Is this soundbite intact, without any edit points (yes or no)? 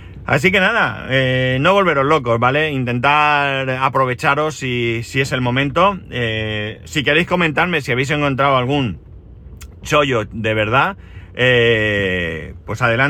yes